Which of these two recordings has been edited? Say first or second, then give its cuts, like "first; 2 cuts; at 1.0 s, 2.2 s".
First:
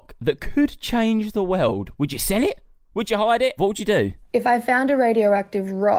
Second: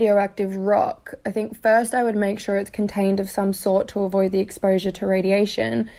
first; 1 cut; at 3.6 s